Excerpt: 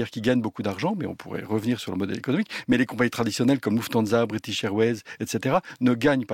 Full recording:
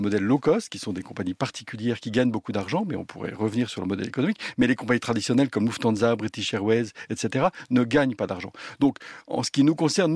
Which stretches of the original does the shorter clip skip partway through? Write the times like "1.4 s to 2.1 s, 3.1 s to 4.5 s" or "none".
none